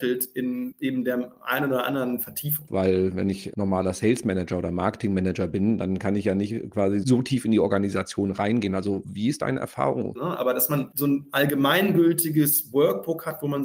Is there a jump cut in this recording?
yes; 2 cuts; at 2.7 s, 10.2 s

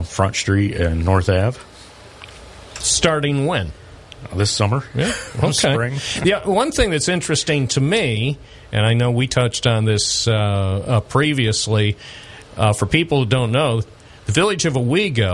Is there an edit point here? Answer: no; 0 cuts

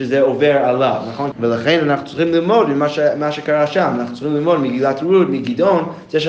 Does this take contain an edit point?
yes; 1 cut; at 1.3 s

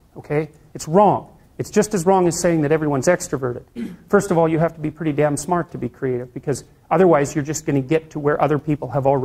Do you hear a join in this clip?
no; 0 cuts

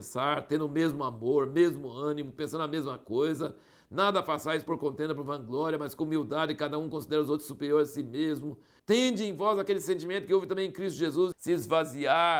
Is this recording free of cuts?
no; 2 cuts; at 8.8 s, 11.3 s

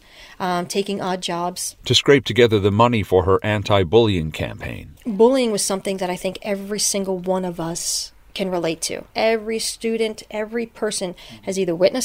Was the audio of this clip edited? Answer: yes; 1 cut; at 9.1 s

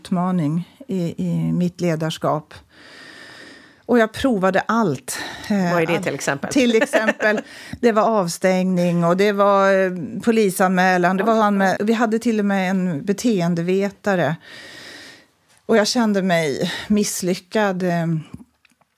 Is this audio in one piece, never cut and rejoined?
no; 1 cut; at 11.8 s

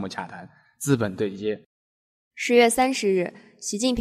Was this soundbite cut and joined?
no; 0 cuts

